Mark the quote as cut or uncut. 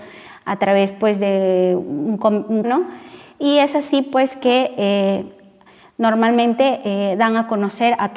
cut